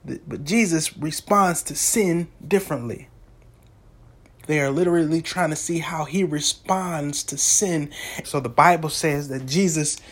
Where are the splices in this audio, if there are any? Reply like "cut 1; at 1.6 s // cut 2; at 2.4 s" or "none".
cut 1; at 4.4 s // cut 2; at 8.2 s